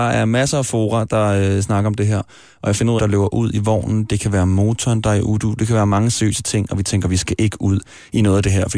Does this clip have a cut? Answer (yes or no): yes